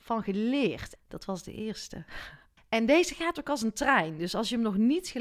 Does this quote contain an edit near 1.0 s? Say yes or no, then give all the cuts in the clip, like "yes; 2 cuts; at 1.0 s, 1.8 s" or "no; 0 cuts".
yes; 2 cuts; at 1.0 s, 2.6 s